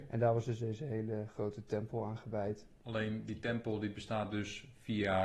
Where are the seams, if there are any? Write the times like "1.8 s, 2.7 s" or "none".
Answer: none